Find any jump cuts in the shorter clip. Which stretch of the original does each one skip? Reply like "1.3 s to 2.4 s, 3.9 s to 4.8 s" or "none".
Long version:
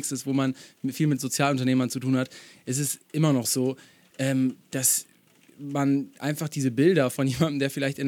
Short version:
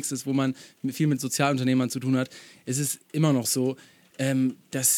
none